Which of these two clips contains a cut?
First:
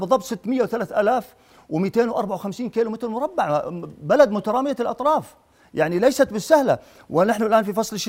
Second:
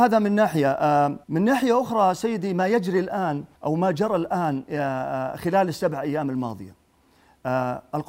second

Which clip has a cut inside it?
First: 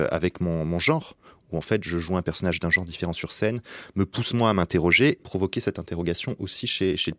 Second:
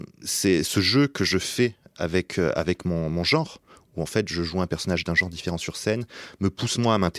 first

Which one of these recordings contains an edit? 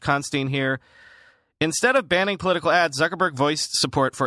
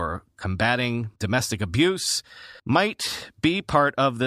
second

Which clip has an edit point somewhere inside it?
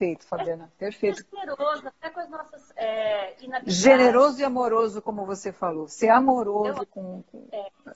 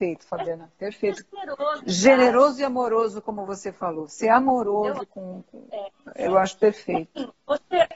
second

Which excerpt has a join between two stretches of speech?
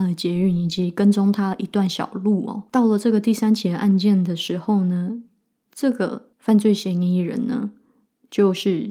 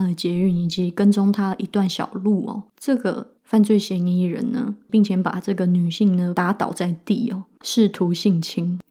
second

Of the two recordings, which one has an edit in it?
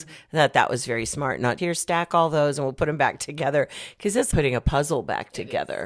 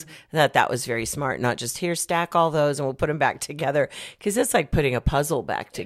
first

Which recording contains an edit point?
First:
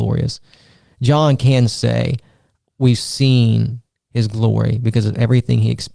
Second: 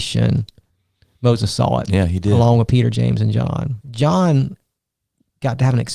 second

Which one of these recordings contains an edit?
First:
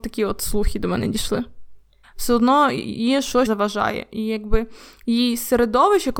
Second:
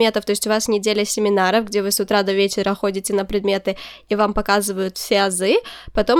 first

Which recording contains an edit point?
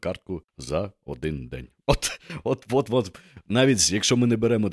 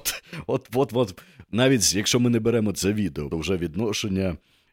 second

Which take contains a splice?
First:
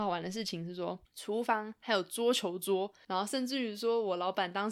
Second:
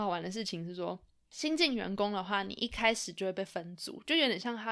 first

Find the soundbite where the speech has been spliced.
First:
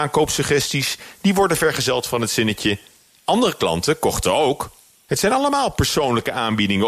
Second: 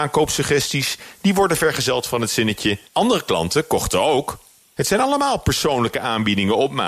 second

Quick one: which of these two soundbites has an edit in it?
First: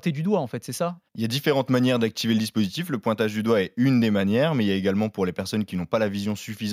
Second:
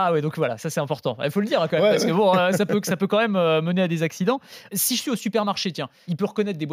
first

